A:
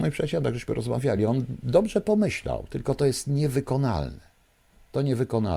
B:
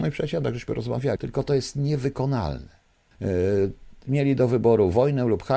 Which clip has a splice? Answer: B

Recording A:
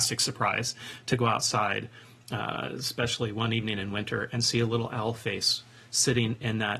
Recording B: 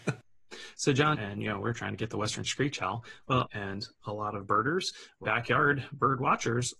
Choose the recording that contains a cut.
B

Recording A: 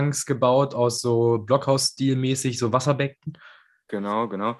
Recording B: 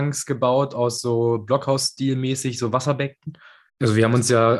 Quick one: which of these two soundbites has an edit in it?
B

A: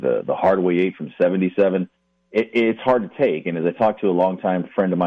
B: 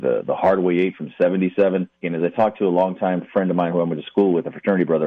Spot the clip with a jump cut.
B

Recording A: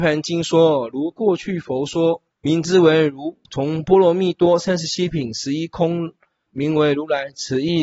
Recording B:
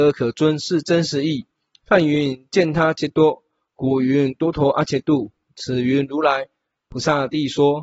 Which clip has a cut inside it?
A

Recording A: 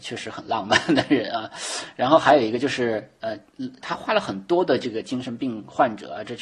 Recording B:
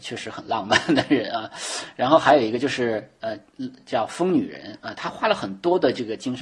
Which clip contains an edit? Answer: A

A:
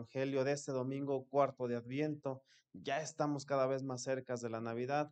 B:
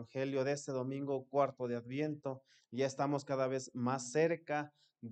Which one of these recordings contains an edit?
B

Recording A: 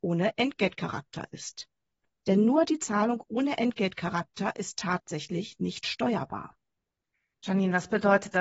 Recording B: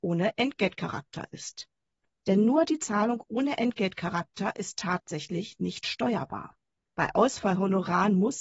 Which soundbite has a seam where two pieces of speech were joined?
B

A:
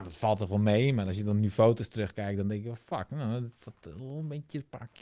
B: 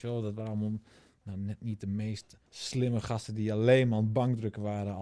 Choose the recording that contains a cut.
B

